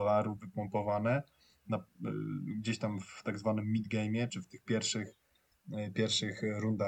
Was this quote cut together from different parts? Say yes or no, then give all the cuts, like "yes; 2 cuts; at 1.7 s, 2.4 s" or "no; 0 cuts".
yes; 1 cut; at 4.3 s